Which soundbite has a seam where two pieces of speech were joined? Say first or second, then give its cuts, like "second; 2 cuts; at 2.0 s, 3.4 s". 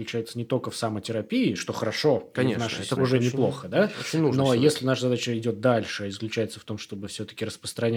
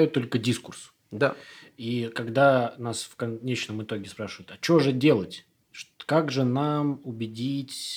first; 1 cut; at 3.0 s